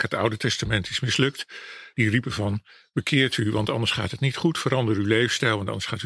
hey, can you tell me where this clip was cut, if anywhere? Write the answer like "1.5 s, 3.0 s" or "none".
1.9 s

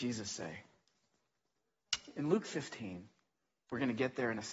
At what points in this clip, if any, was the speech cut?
none

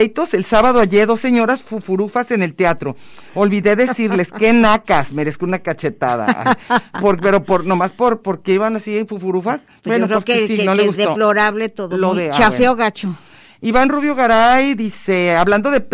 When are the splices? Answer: 6.9 s, 9.8 s

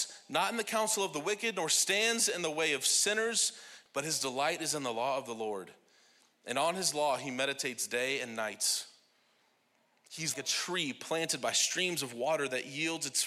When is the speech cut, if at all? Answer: 3.9 s, 10.3 s

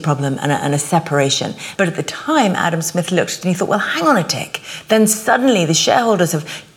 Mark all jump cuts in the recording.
1.8 s

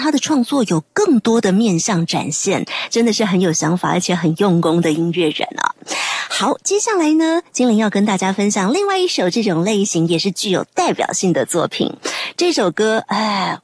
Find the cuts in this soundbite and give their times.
none

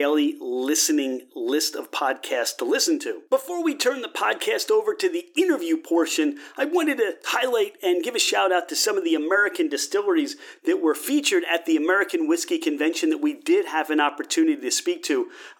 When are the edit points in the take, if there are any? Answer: 7.2 s

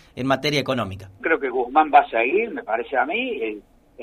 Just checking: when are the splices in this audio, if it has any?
1.2 s

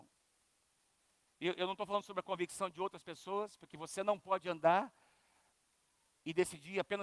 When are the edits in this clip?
none

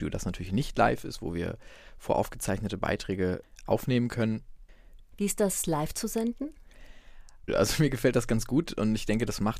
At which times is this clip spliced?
5.0 s, 7.5 s

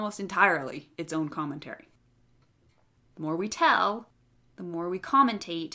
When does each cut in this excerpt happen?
3.0 s

